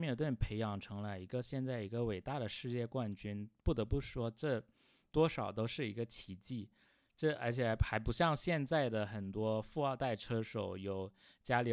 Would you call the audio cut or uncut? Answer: uncut